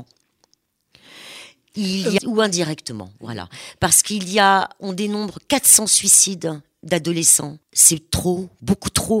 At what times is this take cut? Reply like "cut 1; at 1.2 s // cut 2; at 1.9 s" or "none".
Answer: cut 1; at 2.2 s // cut 2; at 7.6 s